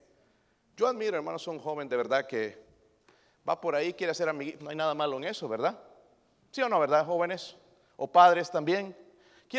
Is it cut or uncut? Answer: cut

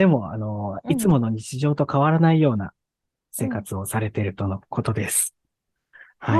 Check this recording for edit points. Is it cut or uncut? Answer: uncut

